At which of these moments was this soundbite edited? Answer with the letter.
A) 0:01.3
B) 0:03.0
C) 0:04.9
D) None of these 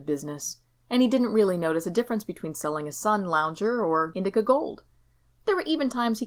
D